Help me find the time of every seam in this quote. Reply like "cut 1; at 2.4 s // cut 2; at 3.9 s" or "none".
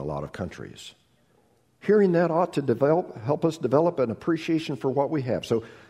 none

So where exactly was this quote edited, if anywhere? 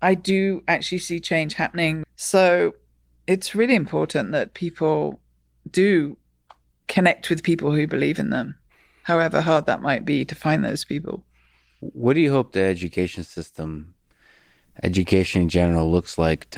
cut 1; at 2.0 s

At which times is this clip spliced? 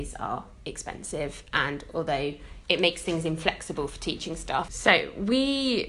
cut 1; at 2.6 s // cut 2; at 4.7 s

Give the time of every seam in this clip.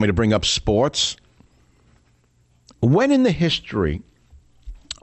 none

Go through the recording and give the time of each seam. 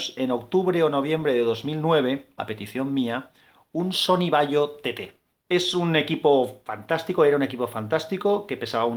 cut 1; at 2.4 s

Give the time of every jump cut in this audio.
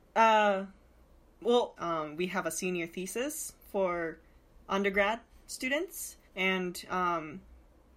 cut 1; at 1.8 s // cut 2; at 6.2 s

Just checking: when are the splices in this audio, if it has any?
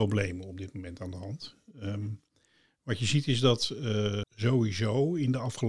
cut 1; at 4.2 s

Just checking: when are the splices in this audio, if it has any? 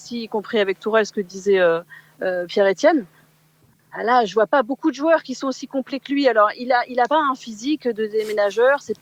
none

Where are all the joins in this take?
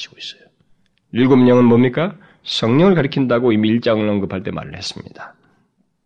none

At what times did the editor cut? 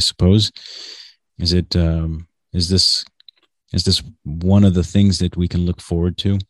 cut 1; at 1.3 s

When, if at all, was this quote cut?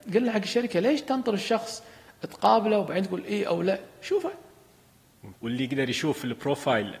cut 1; at 5.3 s

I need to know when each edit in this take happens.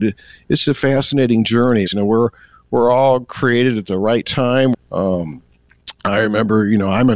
cut 1; at 1.9 s // cut 2; at 4.7 s

